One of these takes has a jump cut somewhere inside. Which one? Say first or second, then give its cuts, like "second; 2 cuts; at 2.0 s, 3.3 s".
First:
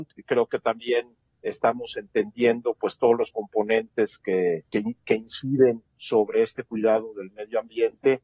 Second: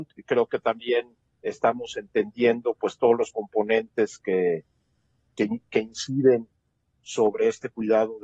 first; 2 cuts; at 4.7 s, 5.9 s